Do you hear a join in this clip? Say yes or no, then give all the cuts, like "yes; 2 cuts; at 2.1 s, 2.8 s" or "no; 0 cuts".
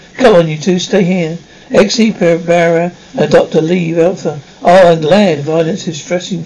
no; 0 cuts